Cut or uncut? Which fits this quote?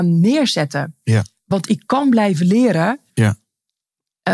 cut